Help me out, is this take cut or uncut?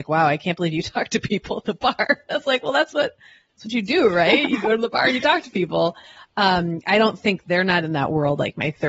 uncut